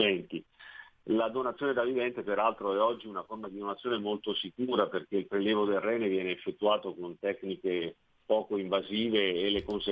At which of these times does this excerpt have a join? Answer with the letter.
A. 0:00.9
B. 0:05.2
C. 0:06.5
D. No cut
D